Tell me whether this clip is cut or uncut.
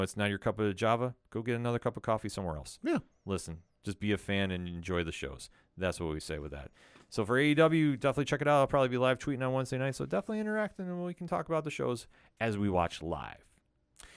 uncut